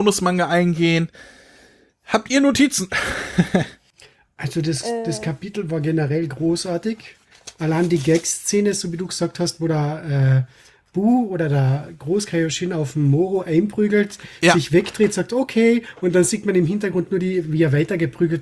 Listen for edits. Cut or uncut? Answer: uncut